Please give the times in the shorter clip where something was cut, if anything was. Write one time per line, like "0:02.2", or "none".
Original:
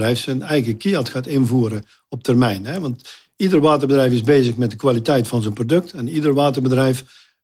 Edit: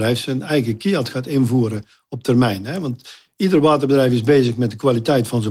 none